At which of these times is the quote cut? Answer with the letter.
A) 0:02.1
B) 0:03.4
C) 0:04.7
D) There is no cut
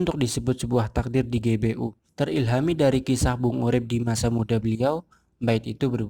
A